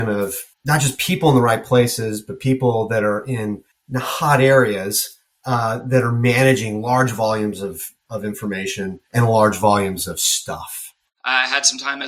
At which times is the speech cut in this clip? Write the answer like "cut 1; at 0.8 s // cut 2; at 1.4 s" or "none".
cut 1; at 9.0 s // cut 2; at 11.1 s